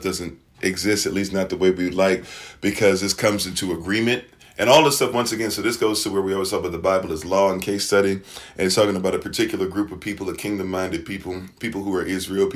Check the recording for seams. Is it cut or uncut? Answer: uncut